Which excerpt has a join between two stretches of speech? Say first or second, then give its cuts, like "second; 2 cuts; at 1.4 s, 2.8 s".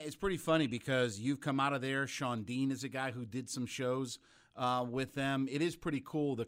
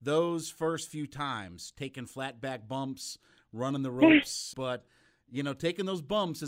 second; 1 cut; at 4.5 s